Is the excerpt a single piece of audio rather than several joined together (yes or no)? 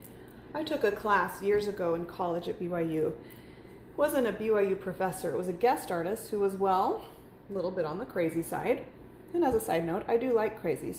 yes